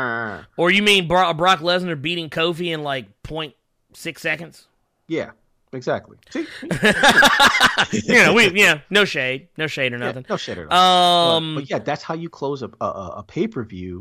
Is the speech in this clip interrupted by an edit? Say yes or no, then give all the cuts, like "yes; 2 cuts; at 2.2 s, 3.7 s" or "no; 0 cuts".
no; 0 cuts